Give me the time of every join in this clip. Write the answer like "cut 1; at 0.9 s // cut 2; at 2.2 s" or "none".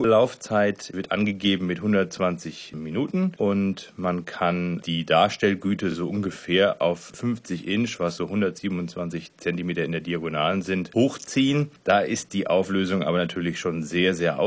none